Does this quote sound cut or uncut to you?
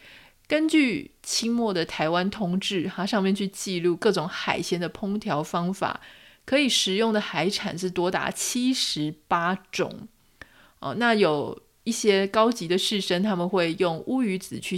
uncut